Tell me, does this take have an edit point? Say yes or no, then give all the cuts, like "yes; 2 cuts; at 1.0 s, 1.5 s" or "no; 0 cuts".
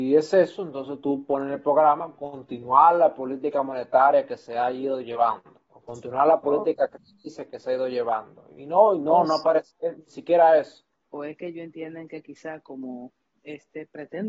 yes; 1 cut; at 11.0 s